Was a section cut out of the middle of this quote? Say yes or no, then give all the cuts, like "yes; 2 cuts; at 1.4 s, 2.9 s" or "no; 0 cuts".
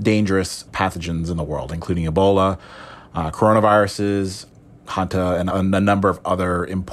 yes; 1 cut; at 5.5 s